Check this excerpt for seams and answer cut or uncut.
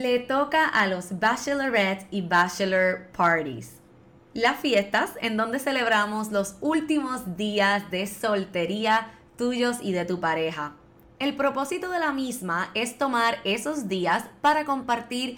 cut